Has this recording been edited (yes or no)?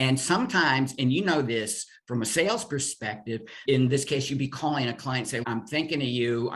yes